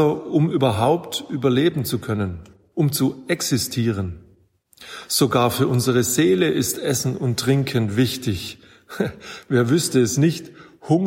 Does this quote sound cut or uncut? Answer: cut